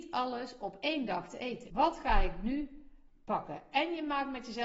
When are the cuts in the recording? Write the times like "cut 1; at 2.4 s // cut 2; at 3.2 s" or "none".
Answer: cut 1; at 1.7 s